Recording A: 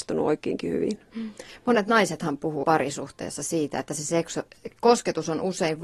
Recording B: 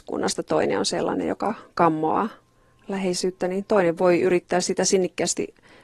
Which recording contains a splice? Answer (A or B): A